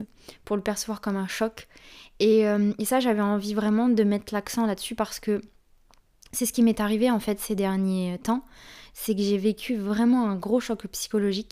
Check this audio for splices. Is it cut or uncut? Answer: uncut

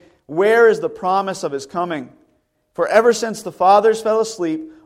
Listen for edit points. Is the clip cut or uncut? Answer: uncut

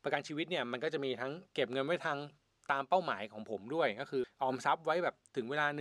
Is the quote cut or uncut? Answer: cut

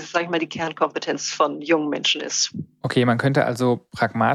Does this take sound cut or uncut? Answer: uncut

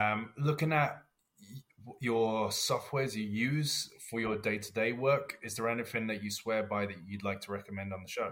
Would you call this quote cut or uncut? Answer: uncut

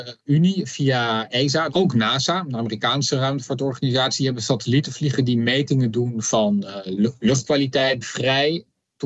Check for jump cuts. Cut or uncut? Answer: cut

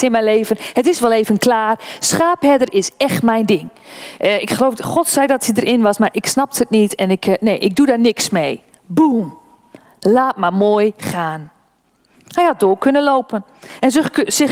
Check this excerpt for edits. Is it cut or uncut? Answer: uncut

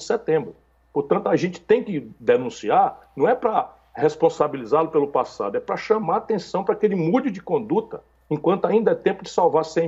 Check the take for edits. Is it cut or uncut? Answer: uncut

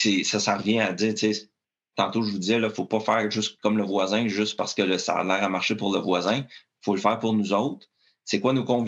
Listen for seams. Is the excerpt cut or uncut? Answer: uncut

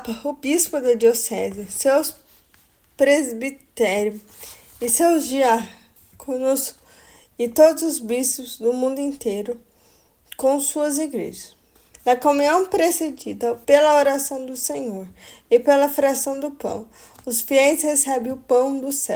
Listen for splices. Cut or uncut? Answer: cut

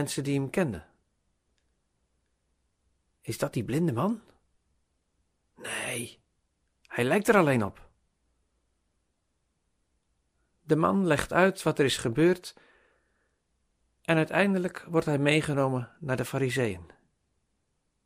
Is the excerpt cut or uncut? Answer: uncut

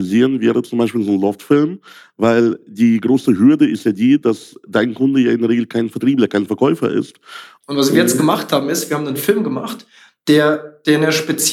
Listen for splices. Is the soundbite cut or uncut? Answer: cut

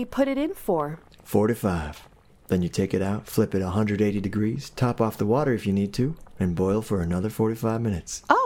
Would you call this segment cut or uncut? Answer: uncut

